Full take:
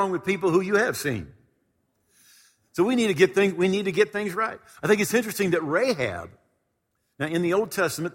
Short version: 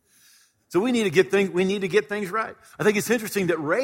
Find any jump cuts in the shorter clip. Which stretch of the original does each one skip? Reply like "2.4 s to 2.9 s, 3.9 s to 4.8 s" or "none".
none